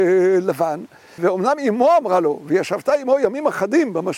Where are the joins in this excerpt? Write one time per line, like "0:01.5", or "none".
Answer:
0:01.2